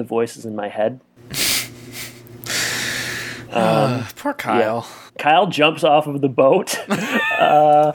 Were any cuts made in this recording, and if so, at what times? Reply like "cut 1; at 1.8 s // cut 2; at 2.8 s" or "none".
cut 1; at 5.1 s